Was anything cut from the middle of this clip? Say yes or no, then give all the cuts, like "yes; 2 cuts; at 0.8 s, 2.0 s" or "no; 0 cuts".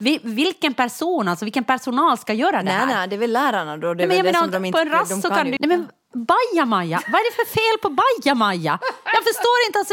yes; 1 cut; at 5.6 s